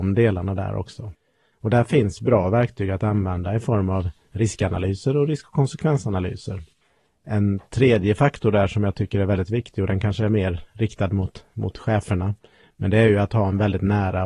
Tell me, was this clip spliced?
yes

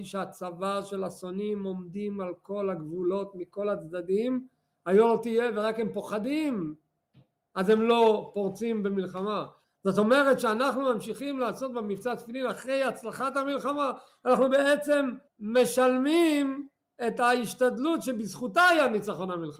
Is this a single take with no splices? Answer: no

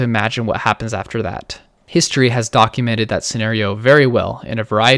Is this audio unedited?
no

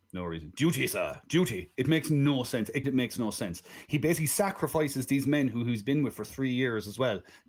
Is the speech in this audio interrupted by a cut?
yes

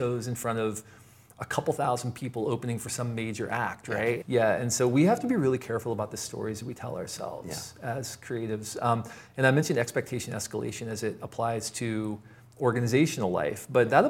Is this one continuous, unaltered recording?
no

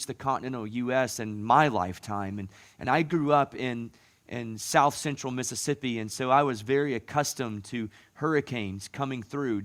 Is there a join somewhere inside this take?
no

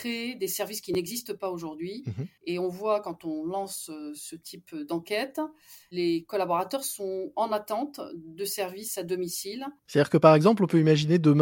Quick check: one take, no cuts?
no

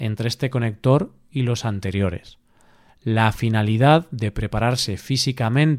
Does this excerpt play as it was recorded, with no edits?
yes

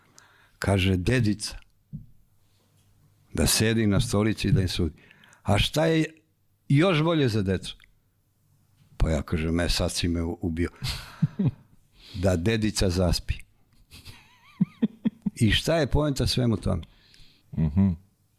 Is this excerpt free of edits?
no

